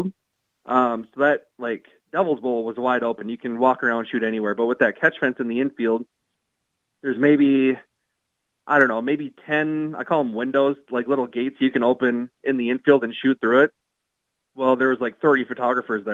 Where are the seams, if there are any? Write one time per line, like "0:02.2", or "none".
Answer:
none